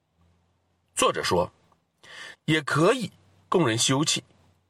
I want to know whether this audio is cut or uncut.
cut